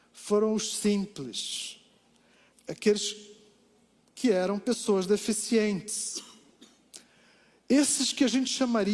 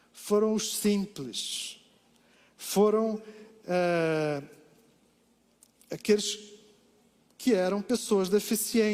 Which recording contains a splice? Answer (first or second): first